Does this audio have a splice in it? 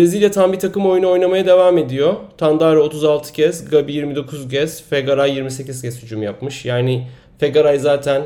no; 0 cuts

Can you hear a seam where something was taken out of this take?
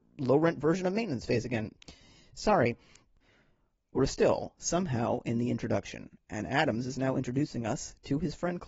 no; 0 cuts

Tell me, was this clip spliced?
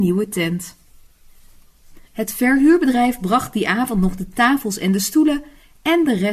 yes; 1 cut; at 2.1 s

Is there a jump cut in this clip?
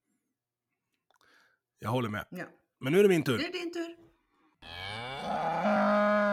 no; 0 cuts

